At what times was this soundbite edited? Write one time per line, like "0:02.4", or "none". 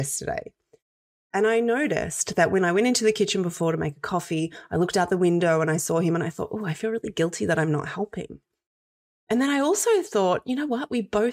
none